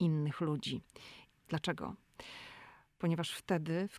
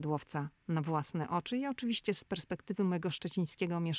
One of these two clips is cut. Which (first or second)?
first